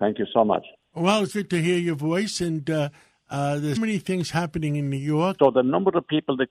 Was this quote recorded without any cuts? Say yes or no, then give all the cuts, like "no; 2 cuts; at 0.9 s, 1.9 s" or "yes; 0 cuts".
no; 3 cuts; at 1.3 s, 3.8 s, 5.4 s